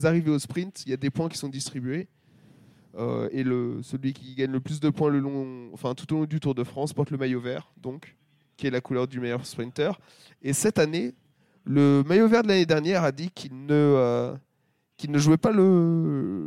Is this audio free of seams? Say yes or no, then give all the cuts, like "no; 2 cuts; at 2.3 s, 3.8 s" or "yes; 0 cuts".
yes; 0 cuts